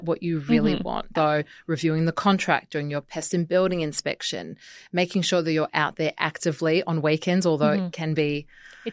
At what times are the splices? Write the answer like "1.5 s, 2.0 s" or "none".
1.2 s